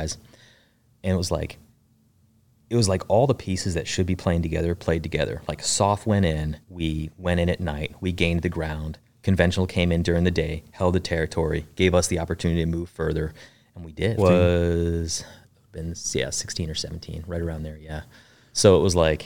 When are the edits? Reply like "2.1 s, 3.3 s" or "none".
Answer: 6.6 s, 14.2 s